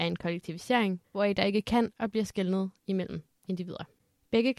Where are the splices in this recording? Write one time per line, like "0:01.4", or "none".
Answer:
0:01.0